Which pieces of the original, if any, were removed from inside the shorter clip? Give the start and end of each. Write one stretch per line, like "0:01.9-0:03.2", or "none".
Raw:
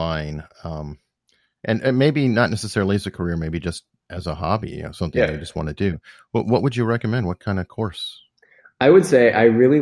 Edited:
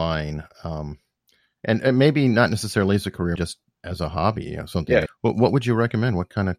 0:03.4-0:03.6
0:05.3-0:06.2

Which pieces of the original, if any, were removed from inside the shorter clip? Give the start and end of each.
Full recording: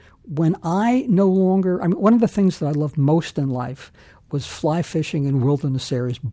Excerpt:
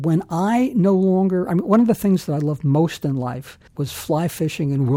0:04.0-0:04.2

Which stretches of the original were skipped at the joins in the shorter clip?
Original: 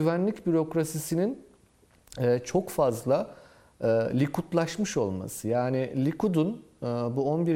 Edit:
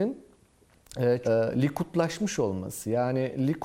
0:02.4-0:03.8

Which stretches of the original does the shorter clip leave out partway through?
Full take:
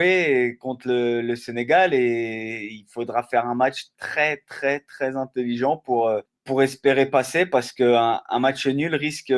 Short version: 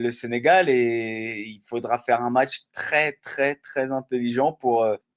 none

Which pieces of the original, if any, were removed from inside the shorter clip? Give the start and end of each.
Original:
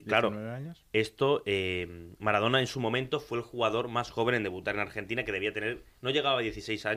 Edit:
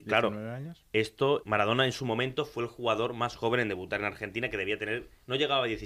0:01.4-0:02.2

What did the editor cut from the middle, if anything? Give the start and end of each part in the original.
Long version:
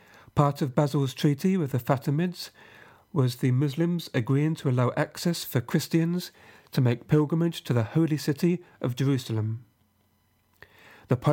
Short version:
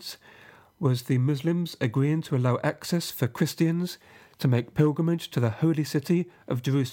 none

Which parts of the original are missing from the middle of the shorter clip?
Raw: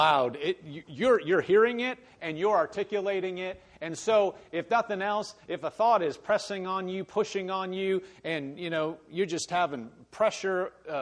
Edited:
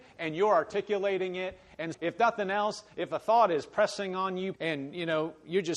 0:04.0-0:04.4
0:07.1-0:08.2

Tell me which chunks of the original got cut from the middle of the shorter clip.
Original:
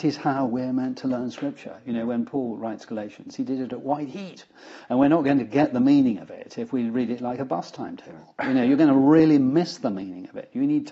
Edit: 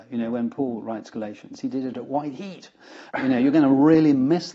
0:04.9-0:08.4

